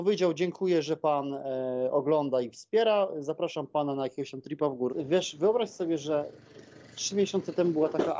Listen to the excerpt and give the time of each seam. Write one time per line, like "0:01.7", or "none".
0:04.9